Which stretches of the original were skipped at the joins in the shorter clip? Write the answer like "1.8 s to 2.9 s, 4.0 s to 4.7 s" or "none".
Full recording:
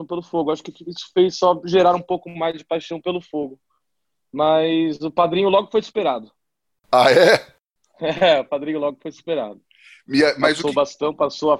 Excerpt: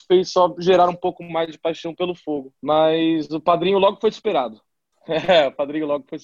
3.6 s to 4.2 s, 6.6 s to 7.9 s